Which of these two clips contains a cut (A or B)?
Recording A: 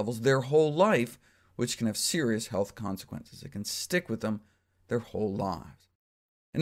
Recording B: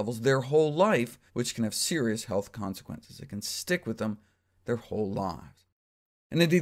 B